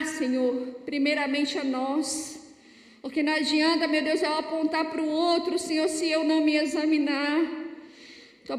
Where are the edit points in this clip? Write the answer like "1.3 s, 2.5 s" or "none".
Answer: none